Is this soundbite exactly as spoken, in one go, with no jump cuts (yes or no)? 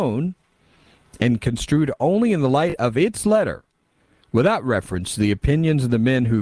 yes